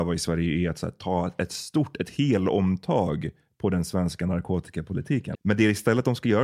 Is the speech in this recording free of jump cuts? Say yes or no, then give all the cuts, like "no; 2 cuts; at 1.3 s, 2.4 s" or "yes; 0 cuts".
no; 1 cut; at 5.3 s